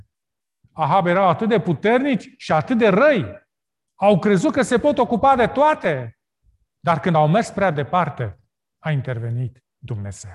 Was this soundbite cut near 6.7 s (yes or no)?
yes